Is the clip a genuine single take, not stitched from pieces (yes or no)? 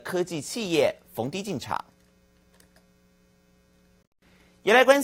yes